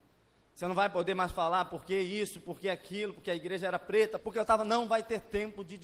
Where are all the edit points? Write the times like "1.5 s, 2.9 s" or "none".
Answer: 4.2 s